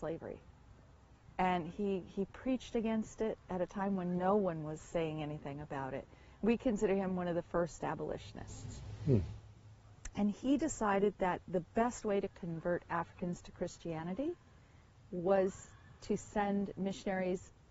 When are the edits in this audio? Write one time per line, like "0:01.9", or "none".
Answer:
none